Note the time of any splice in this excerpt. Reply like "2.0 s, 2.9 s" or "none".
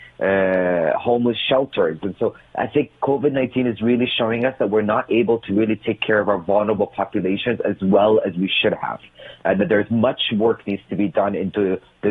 none